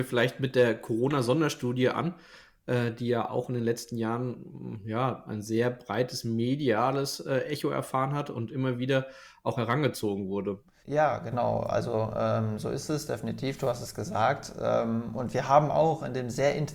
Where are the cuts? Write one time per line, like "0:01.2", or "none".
0:10.8

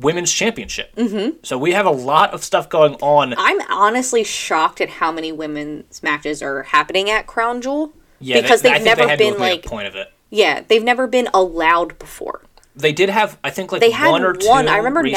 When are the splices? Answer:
none

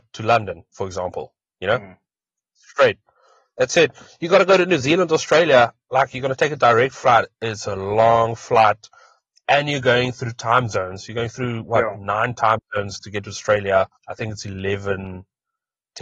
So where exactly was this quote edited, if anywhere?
0:14.0

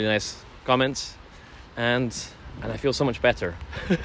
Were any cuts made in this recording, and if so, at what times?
0:01.7

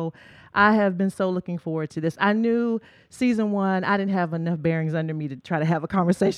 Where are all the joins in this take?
none

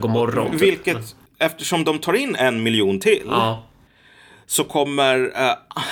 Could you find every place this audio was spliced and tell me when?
none

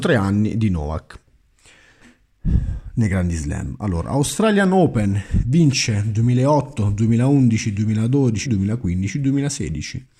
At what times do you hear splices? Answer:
0:08.4

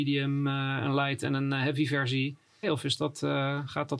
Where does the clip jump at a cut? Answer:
0:02.6

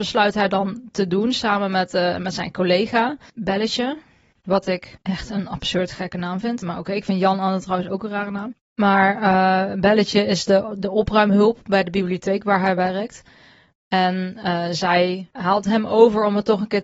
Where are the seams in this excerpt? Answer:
none

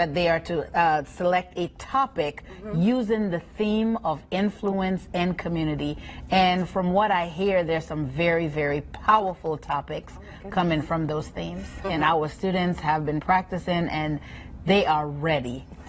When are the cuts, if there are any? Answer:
0:11.8

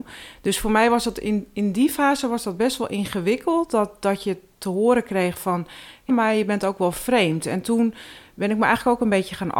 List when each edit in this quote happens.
0:06.1

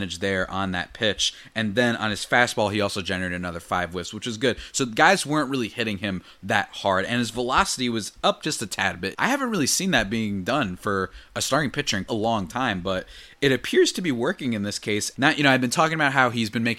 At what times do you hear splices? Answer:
0:09.1
0:12.1
0:15.1

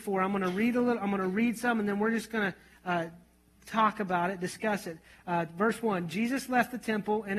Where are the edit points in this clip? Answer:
none

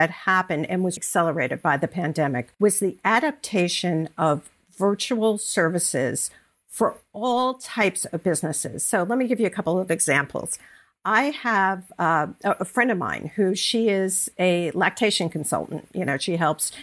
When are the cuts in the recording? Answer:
0:01.0
0:02.5

